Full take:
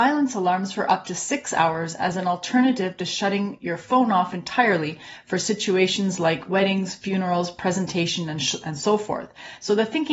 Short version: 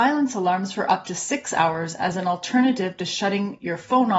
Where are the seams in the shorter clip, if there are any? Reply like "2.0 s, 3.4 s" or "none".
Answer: none